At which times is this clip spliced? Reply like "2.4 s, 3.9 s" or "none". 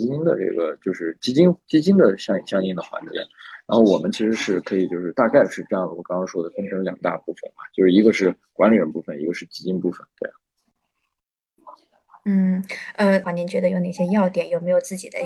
13.2 s